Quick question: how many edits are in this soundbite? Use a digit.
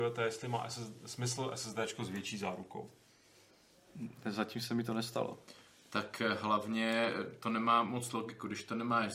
0